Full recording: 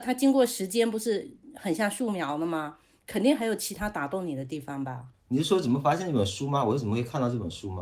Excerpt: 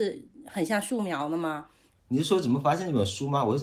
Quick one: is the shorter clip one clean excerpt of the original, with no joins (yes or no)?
no